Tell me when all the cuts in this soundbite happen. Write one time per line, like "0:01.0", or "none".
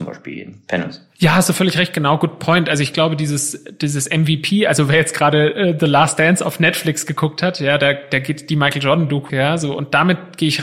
0:09.3